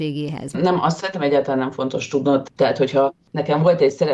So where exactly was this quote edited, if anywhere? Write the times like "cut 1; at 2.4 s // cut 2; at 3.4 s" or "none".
cut 1; at 2.5 s